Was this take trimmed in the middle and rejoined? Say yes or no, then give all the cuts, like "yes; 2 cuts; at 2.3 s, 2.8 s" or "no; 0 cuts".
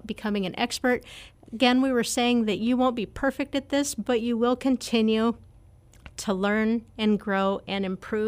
yes; 1 cut; at 1.3 s